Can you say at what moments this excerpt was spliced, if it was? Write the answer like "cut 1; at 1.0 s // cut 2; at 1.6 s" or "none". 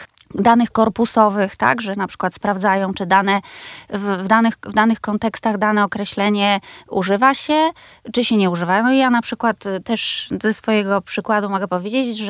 none